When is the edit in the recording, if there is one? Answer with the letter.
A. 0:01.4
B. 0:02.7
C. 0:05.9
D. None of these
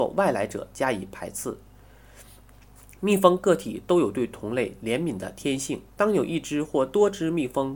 C